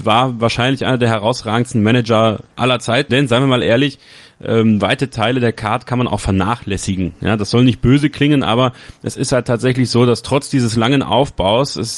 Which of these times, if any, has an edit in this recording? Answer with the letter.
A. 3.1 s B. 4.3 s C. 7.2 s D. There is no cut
A